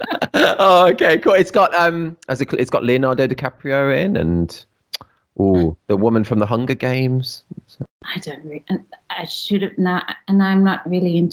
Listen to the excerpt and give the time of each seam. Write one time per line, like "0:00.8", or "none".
0:07.9

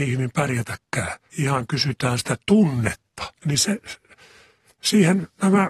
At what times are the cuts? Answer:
0:01.3
0:03.4

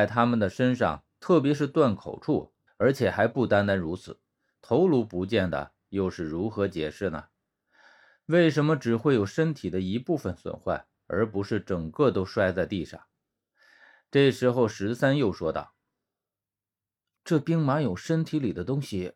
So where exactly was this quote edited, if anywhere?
0:02.7
0:04.5

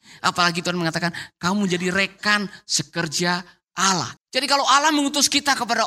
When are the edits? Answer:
0:04.2

